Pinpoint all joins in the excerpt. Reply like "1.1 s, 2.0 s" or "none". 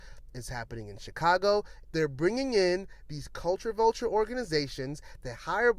1.8 s